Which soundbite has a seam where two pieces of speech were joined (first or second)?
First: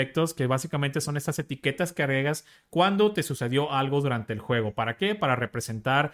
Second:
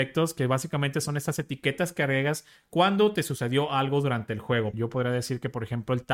second